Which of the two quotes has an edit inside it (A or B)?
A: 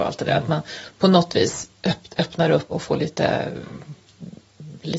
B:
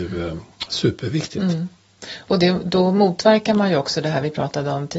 A